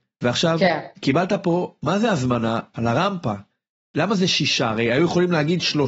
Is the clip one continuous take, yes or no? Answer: yes